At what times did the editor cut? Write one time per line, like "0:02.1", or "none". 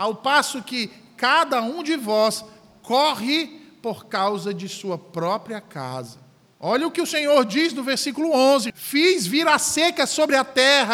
0:06.5
0:08.7